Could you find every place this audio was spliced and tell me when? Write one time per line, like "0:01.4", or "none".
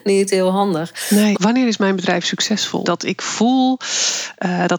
0:01.3
0:02.8